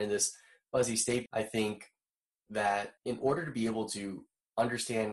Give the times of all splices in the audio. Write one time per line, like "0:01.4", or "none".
0:01.3
0:03.0

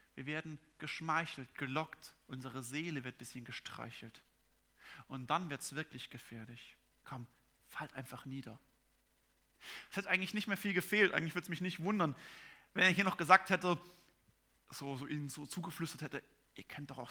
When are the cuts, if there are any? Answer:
0:06.9

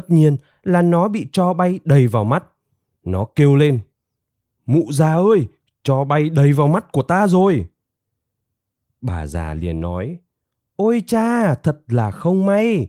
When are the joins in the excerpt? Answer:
none

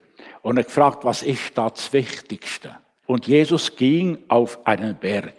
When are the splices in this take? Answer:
0:03.0

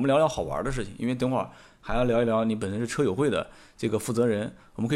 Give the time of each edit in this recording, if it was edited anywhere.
none

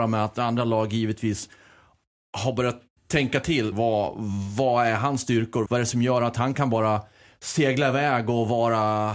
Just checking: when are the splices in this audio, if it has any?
0:03.7
0:05.7

